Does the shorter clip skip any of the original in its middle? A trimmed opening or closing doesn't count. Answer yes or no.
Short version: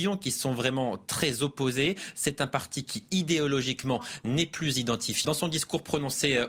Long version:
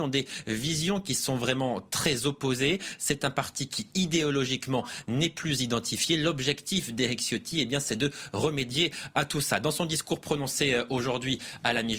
yes